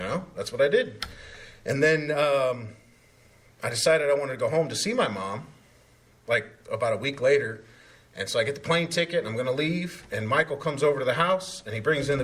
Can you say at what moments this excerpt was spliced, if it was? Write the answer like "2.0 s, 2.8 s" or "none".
none